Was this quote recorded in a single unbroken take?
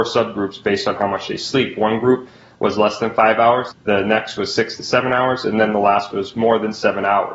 no; 1 cut; at 3.7 s

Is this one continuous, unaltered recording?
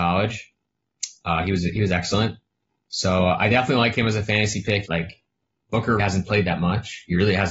no; 2 cuts; at 4.9 s, 6.0 s

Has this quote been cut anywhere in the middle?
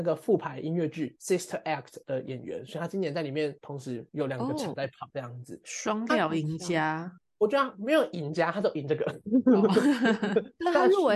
no; 0 cuts

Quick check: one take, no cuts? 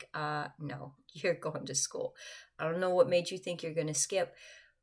yes; 0 cuts

